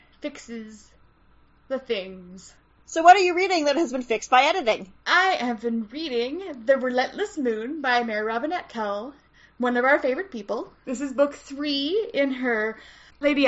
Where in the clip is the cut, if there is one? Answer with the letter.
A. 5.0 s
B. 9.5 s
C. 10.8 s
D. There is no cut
A